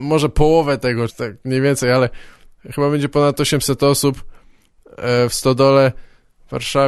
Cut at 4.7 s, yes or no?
no